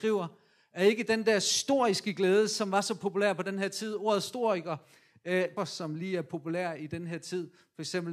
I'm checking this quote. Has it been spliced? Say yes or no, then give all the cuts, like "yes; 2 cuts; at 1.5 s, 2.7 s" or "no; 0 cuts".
yes; 1 cut; at 5.6 s